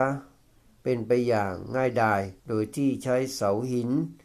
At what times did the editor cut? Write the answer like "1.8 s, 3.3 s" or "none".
2.4 s